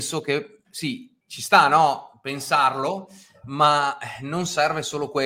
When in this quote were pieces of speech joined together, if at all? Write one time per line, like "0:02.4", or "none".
0:01.2